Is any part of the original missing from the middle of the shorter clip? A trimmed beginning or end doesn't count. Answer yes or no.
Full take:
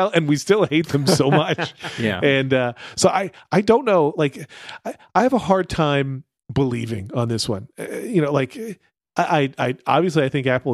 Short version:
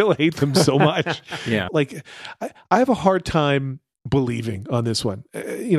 yes